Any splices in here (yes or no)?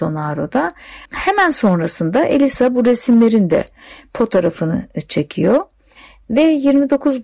yes